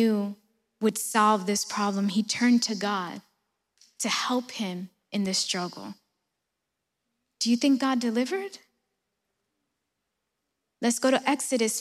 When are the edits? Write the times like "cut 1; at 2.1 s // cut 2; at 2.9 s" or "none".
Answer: none